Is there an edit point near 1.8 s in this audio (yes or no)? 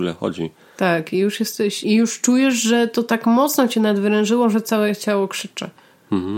yes